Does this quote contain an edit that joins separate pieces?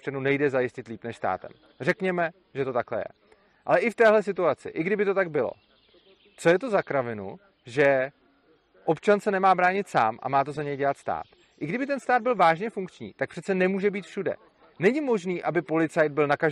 no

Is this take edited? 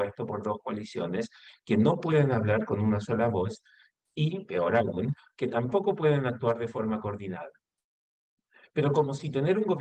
no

